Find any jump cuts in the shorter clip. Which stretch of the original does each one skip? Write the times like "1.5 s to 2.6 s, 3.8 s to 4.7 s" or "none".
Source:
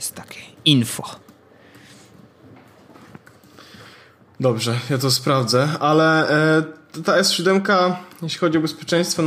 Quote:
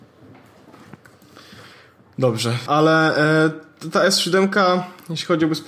4.9 s to 5.8 s